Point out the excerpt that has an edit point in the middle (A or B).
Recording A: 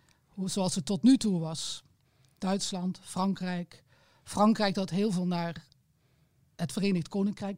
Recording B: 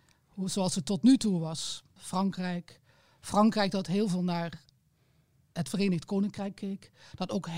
B